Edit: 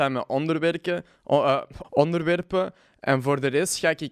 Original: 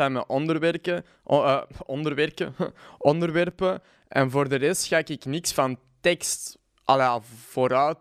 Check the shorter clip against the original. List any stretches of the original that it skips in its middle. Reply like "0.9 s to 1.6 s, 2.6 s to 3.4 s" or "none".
1.8 s to 2.9 s

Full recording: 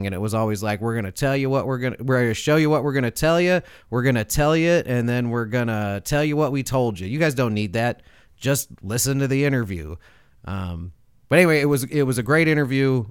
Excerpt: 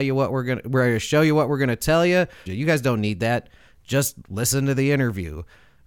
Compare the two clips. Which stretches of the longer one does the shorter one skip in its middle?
3.8 s to 7.0 s

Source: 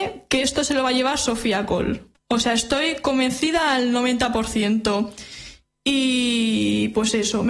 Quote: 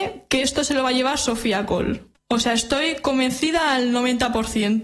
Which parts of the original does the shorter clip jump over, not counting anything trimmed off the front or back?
none

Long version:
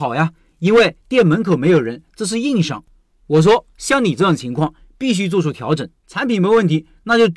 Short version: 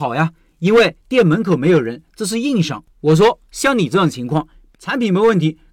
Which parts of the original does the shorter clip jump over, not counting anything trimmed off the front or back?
2.9 s to 3.2 s, 5.0 s to 6.0 s

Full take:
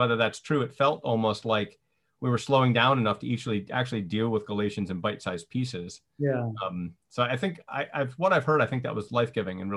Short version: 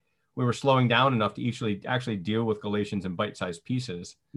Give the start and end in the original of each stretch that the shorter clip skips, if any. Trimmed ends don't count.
none

